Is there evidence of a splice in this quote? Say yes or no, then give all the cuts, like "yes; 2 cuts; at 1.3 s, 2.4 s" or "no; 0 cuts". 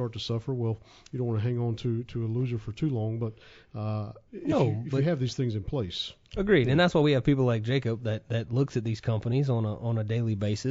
yes; 1 cut; at 4.3 s